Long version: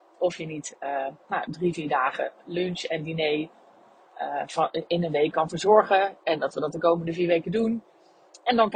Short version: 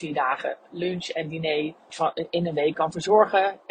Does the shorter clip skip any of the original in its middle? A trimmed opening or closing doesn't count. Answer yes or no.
yes